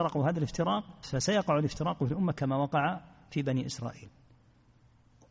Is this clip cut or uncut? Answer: cut